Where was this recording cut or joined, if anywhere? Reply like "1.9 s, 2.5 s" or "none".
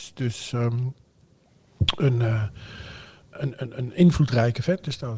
3.3 s